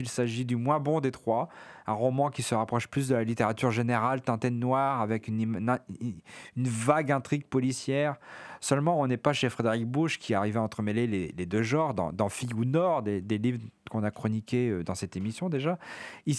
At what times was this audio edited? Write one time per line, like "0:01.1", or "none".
none